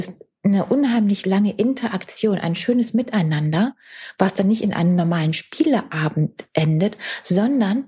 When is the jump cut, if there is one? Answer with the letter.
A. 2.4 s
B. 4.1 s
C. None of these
C